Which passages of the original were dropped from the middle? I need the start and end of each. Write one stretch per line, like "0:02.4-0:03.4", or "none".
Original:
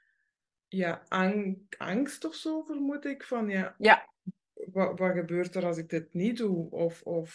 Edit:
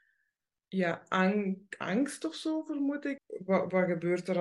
0:03.2-0:04.4